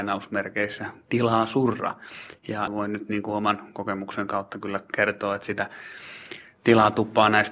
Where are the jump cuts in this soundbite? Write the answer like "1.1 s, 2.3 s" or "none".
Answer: 2.7 s